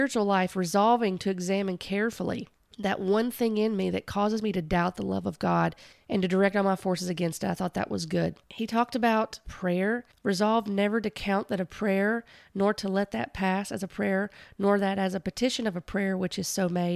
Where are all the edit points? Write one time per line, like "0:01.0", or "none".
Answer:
0:08.4

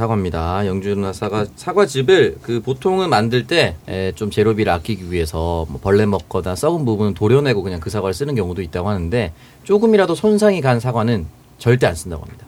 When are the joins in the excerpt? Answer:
0:03.8

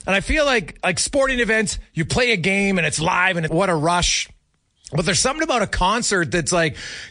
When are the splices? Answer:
0:03.5

